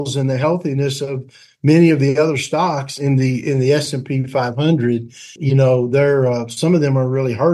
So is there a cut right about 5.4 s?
yes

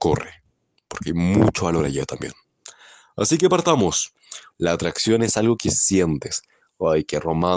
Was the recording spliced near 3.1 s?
no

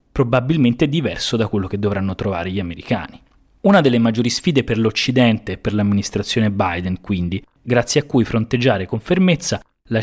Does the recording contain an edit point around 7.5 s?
yes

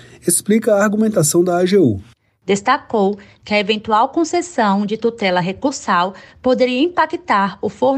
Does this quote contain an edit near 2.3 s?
no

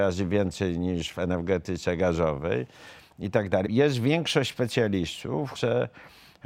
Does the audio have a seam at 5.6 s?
yes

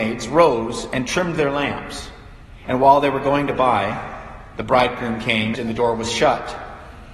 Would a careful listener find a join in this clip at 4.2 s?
no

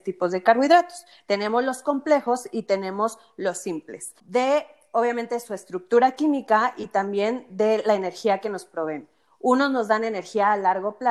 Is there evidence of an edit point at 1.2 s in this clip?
no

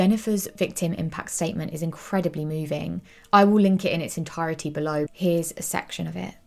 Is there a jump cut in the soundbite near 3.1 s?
no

